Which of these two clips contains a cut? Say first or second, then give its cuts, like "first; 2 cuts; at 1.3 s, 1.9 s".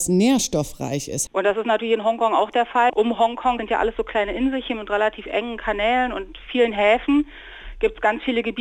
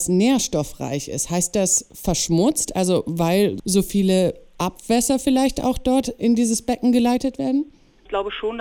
first; 2 cuts; at 1.3 s, 2.9 s